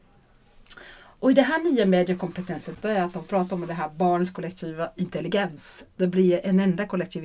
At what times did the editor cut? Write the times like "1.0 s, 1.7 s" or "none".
2.7 s